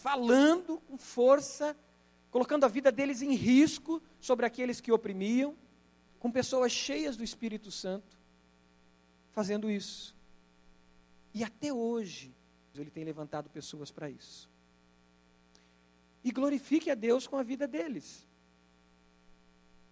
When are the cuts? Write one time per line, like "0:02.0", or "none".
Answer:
0:06.1
0:12.7
0:16.1